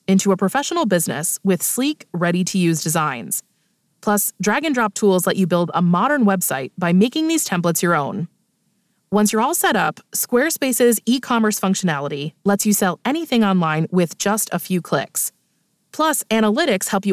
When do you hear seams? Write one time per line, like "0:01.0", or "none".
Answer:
none